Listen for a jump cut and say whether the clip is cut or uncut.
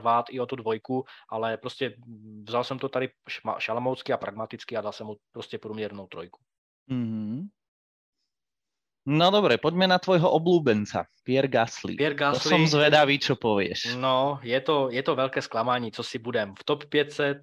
uncut